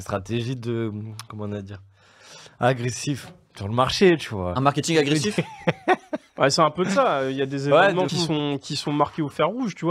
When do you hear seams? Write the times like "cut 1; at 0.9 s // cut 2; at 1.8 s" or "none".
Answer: cut 1; at 8.1 s

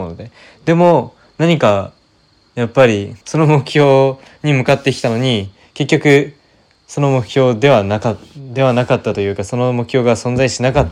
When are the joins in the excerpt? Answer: cut 1; at 3.2 s

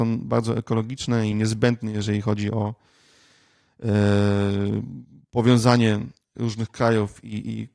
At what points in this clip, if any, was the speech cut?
cut 1; at 6.4 s

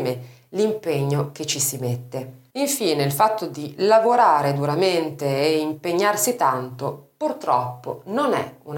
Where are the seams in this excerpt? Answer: cut 1; at 2.5 s

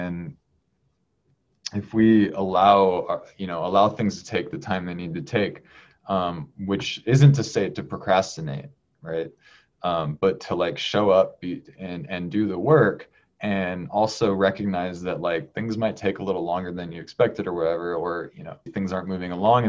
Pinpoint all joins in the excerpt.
cut 1; at 18.7 s

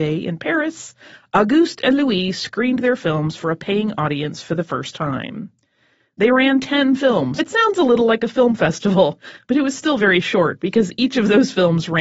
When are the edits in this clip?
cut 1; at 7.4 s

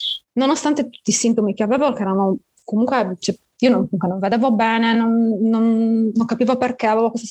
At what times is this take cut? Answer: none

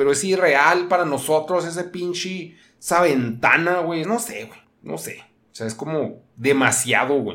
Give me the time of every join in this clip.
cut 1; at 4.0 s

